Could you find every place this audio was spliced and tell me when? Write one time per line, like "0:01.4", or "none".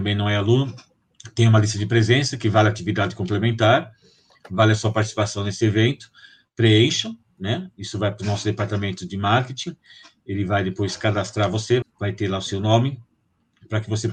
0:11.8